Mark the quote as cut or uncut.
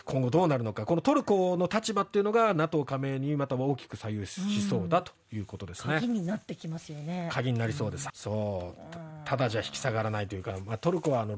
cut